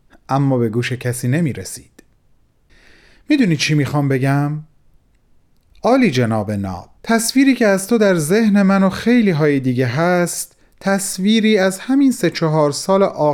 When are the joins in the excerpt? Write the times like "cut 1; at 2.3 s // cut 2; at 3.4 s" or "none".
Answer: cut 1; at 5.7 s // cut 2; at 7.0 s